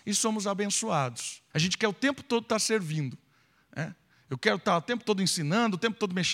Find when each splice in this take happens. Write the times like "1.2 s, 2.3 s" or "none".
1.5 s